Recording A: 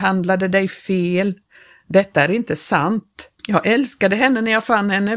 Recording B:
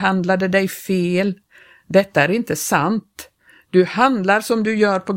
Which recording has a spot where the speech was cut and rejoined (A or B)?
A